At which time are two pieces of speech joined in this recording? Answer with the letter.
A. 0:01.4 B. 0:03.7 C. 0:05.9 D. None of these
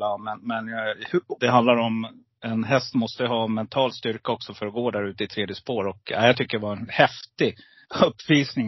A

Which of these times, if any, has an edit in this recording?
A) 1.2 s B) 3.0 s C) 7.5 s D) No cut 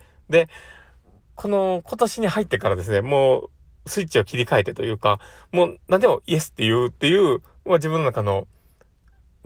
D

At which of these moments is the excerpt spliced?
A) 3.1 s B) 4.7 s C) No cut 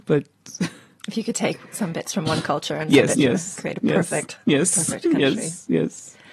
A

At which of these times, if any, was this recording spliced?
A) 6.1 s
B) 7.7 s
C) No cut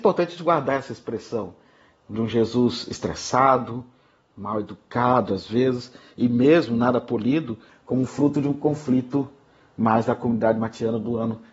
B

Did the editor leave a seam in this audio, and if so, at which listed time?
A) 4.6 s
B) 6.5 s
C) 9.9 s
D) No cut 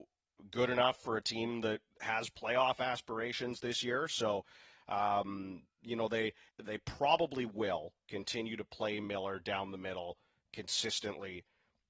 B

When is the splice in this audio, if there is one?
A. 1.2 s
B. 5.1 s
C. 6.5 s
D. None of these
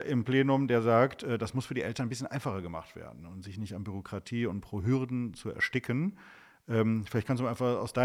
D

